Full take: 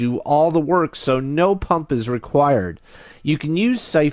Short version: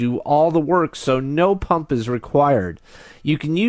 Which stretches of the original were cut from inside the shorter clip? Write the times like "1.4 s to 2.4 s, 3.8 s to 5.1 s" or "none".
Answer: none